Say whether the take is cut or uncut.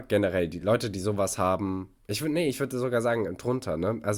uncut